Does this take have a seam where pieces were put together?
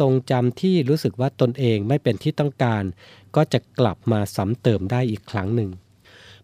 no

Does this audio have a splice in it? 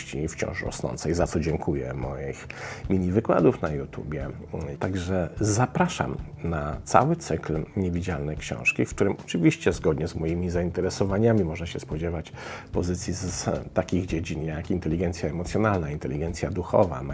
yes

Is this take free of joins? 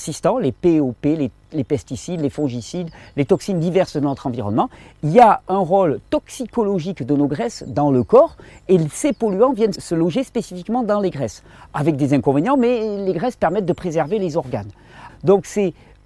no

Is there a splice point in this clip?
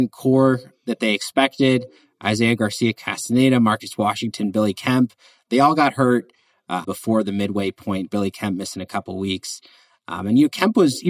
yes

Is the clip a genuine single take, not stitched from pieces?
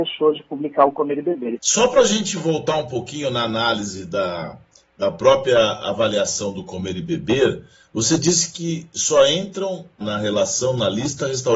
no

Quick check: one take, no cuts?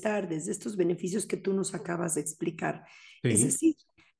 yes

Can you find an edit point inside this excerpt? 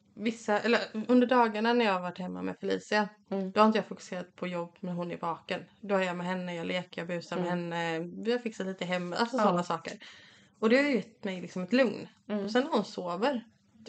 no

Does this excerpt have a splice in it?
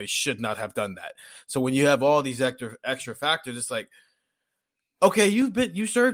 no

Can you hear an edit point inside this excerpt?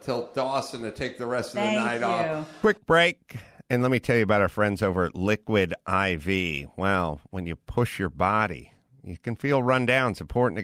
no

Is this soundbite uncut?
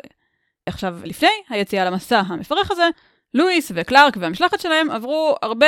yes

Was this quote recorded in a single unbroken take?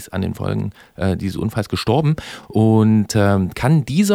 yes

